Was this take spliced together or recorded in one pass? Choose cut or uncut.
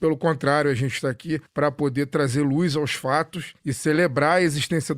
uncut